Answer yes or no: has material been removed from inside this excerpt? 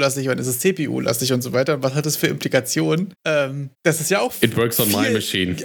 no